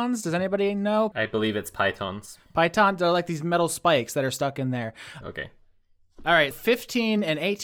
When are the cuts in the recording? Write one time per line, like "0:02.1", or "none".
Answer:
0:01.1
0:05.2
0:06.5